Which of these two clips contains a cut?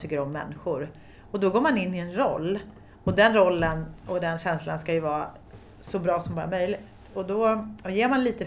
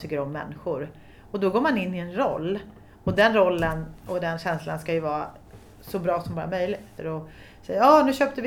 second; 1 cut; at 7.0 s

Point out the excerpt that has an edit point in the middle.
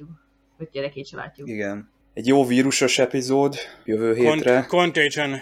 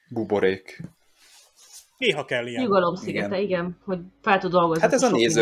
first; 2 cuts; at 2.0 s, 3.9 s

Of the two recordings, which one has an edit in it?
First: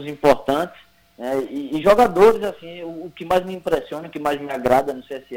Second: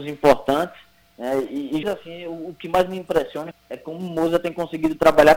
second; 2 cuts; at 1.8 s, 3.5 s

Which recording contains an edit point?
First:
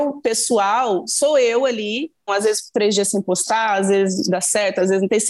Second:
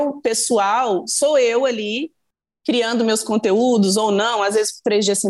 first; 1 cut; at 2.3 s

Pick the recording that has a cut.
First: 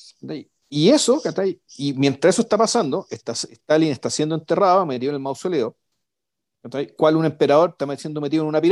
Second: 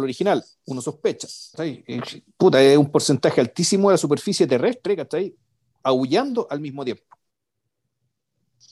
second; 1 cut; at 1.5 s

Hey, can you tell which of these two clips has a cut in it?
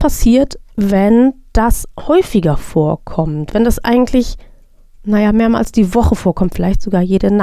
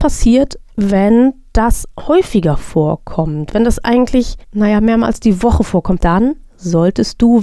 second; 2 cuts; at 4.4 s, 6.0 s

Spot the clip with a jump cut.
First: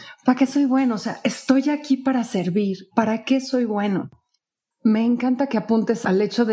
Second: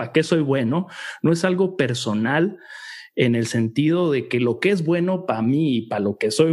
first; 2 cuts; at 2.9 s, 4.7 s

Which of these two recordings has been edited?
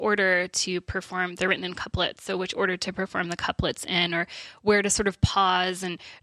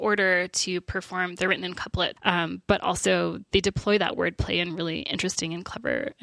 second; 2 cuts; at 2.2 s, 3.5 s

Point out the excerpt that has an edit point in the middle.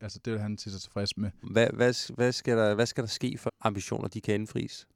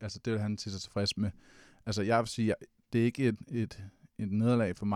first; 2 cuts; at 1.4 s, 3.5 s

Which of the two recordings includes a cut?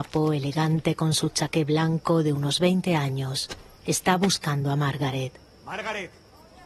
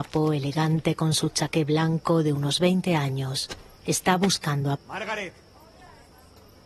second; 1 cut; at 4.7 s

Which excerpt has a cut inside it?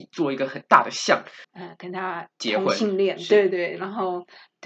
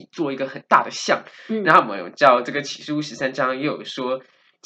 first; 1 cut; at 1.4 s

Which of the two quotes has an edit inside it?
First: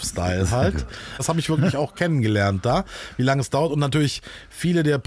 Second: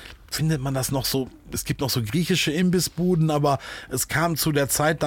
first; 1 cut; at 1.2 s

